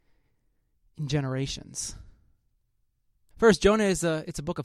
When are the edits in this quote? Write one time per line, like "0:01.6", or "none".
0:03.3

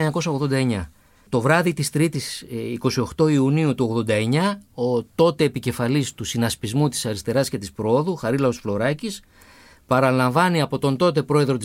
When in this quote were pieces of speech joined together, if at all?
none

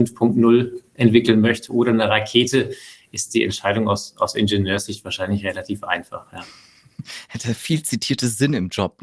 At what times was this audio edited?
none

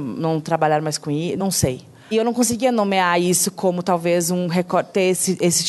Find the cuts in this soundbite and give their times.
none

